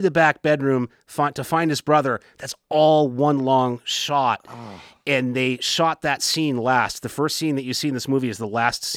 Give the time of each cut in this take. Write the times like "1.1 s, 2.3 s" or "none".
none